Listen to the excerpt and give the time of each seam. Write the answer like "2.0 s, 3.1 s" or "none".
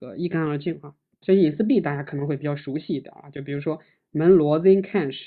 1.2 s